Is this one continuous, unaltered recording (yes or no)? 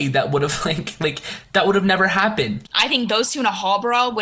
no